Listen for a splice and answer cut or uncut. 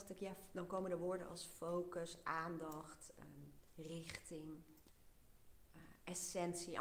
uncut